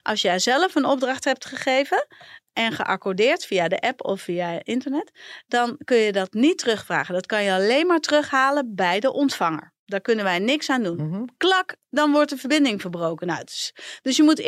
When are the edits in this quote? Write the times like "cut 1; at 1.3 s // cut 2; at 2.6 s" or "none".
none